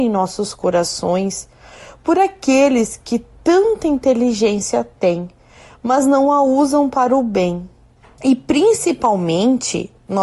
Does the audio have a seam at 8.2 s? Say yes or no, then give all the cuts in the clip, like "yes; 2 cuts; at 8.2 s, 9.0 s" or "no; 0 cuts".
yes; 1 cut; at 8.2 s